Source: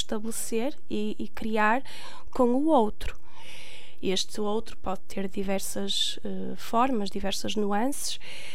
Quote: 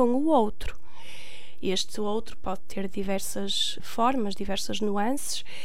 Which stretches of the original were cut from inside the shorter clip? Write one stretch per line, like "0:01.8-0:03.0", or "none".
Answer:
0:06.2-0:06.5